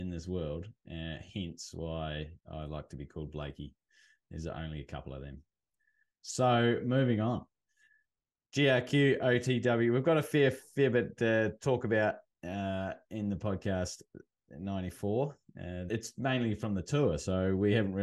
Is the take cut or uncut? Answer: cut